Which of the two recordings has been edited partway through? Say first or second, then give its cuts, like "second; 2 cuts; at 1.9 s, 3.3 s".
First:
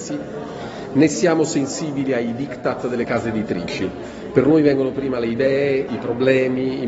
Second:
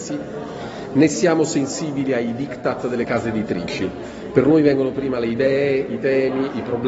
first; 1 cut; at 5.9 s